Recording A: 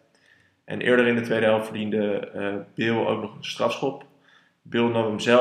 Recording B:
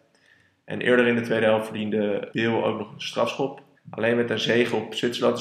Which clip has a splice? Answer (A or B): B